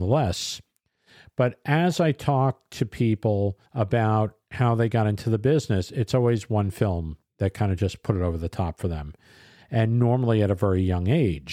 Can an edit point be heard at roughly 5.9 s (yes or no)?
no